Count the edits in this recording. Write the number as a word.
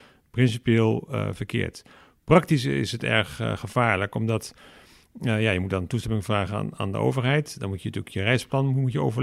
zero